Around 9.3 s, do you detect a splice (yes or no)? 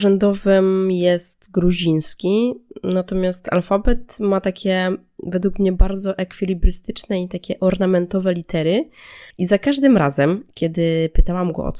yes